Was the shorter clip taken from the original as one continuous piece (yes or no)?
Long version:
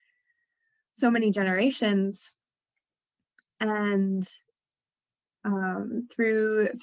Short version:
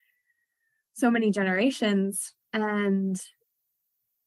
no